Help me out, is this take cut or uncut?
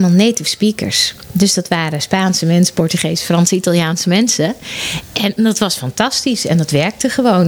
uncut